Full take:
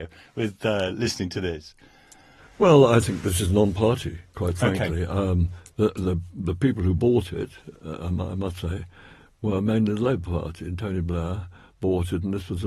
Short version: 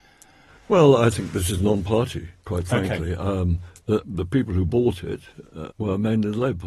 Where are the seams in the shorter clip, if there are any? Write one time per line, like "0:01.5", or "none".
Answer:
0:04.0
0:05.7